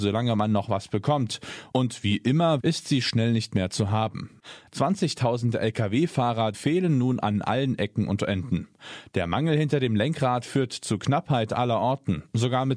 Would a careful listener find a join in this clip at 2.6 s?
yes; 3 cuts; at 2.6 s, 4.7 s, 6.5 s

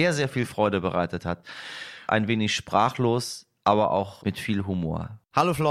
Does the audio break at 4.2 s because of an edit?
yes; 2 cuts; at 2.1 s, 4.2 s

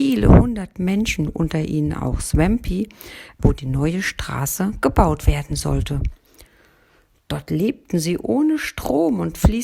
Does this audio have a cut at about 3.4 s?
yes; 1 cut; at 3.4 s

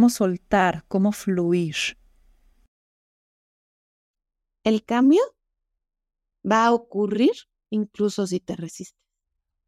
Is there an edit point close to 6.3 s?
yes; 1 cut; at 6.3 s

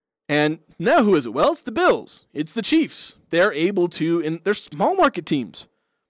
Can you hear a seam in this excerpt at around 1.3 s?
no; 1 cut; at 3.3 s

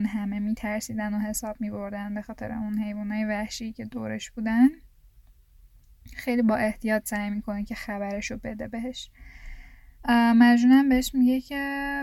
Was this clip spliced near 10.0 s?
yes; 1 cut; at 10.0 s

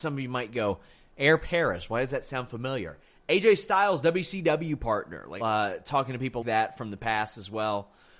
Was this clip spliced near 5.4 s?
yes; 2 cuts; at 5.4 s, 6.4 s

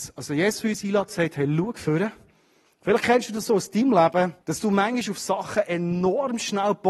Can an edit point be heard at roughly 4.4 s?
yes; 2 cuts; at 2.7 s, 4.4 s

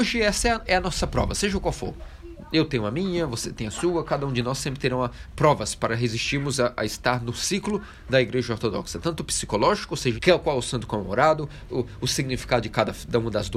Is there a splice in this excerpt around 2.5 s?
no; 2 cuts; at 10.2 s, 11.7 s

